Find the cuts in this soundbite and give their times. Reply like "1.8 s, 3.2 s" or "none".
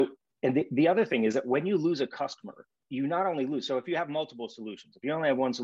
2.8 s